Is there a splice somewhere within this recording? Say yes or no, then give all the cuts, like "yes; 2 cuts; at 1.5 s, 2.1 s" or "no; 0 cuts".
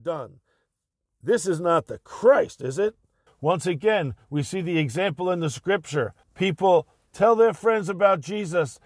yes; 2 cuts; at 3.3 s, 6.2 s